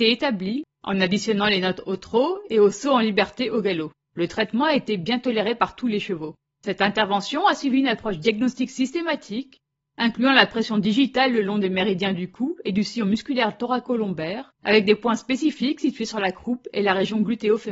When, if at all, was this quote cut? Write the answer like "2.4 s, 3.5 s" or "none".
4.1 s, 6.5 s, 14.6 s